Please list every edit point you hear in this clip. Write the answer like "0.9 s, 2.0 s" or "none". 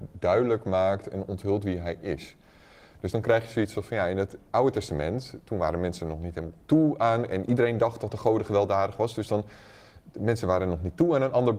none